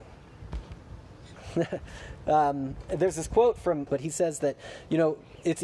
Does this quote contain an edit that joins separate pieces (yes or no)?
yes